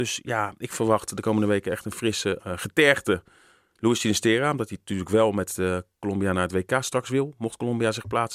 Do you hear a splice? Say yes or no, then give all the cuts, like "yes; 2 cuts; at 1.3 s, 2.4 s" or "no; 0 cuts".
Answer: yes; 1 cut; at 2.4 s